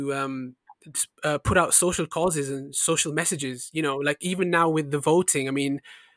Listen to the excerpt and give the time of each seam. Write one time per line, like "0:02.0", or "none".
none